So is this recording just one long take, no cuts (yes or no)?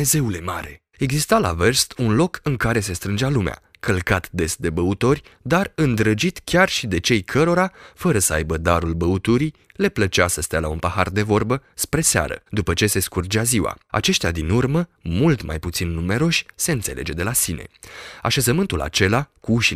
yes